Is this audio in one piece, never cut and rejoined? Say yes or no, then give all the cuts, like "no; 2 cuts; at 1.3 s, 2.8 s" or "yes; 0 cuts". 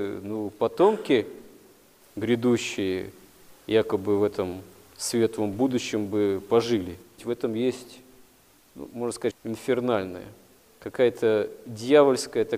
no; 2 cuts; at 7.2 s, 9.3 s